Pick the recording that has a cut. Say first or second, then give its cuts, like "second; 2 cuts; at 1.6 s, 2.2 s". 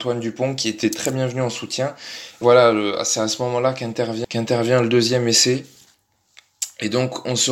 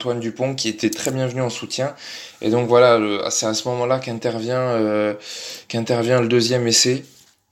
first; 2 cuts; at 2.4 s, 4.2 s